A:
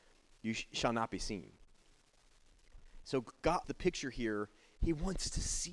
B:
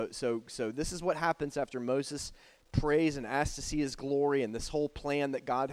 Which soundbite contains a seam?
A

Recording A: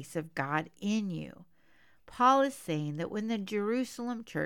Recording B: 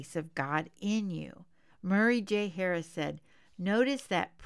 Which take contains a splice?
B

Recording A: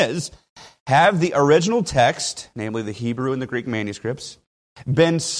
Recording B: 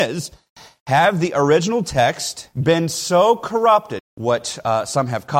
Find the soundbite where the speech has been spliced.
B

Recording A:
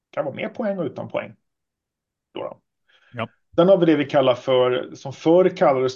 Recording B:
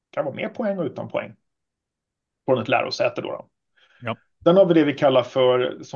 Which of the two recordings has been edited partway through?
A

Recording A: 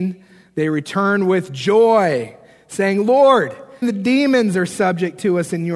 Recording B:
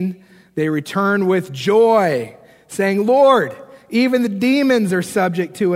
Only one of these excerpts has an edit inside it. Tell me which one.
A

